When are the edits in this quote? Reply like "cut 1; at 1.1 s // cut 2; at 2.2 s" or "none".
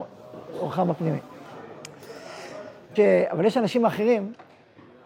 cut 1; at 3.0 s